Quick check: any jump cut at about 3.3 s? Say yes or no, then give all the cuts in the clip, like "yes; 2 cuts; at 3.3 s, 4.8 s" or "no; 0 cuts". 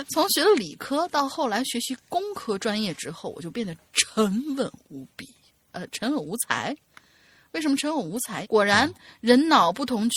no; 1 cut; at 8.4 s